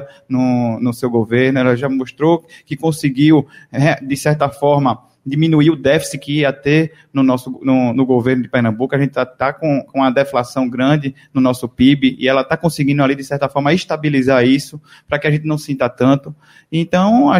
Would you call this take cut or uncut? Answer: uncut